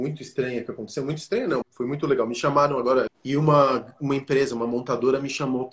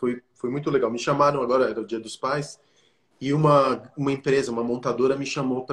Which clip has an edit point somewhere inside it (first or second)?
first